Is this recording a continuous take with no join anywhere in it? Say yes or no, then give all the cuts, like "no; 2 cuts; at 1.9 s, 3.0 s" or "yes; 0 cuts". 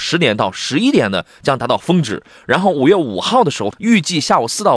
no; 1 cut; at 3.7 s